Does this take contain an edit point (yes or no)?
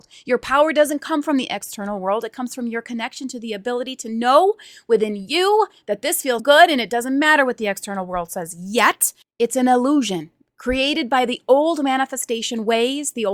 yes